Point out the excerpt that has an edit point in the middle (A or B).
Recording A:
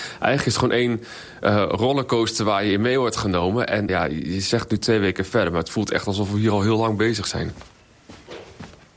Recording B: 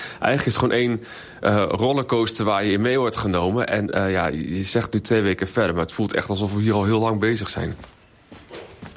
A